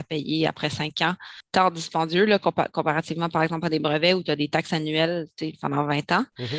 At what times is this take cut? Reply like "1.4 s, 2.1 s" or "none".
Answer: 1.4 s